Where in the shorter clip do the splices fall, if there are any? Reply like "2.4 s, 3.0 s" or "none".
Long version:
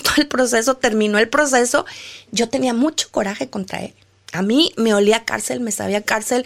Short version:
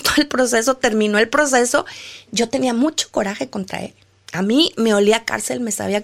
none